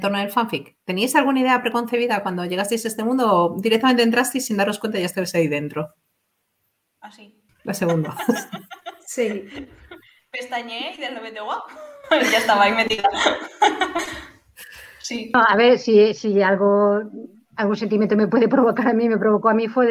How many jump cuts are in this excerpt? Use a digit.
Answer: 1